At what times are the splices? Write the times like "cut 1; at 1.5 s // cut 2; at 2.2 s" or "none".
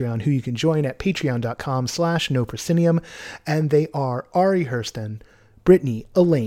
none